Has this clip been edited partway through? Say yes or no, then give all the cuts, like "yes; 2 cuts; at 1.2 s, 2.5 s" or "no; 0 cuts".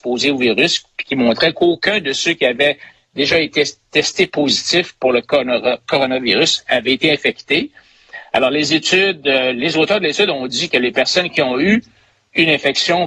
no; 0 cuts